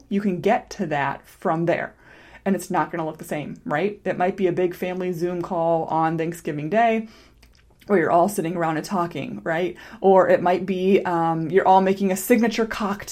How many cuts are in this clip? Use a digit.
0